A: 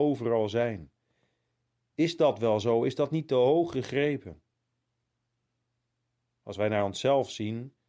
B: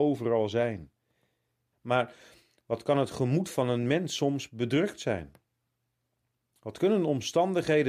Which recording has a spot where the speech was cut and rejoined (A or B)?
B